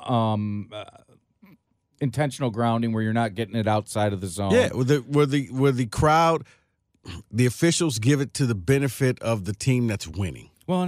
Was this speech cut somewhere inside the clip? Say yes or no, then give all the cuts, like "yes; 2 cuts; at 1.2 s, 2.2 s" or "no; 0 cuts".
no; 0 cuts